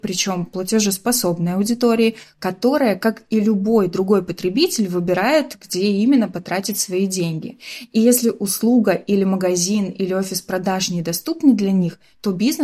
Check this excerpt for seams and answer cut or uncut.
uncut